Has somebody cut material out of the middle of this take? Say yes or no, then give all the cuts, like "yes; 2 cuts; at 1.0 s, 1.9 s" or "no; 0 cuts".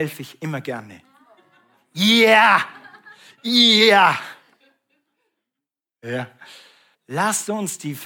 yes; 1 cut; at 6.9 s